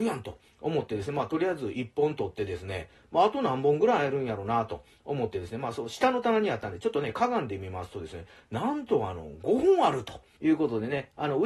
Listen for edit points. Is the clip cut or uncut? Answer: cut